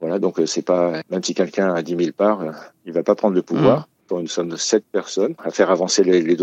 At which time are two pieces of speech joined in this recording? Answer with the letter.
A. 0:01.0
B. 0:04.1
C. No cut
B